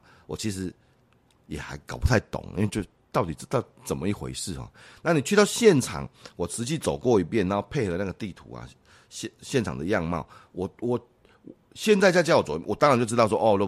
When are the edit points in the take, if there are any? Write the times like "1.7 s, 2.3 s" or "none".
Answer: none